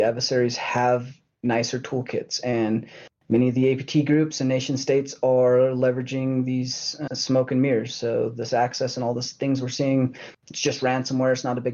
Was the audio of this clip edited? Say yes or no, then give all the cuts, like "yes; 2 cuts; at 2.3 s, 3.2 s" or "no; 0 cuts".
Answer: yes; 1 cut; at 7.1 s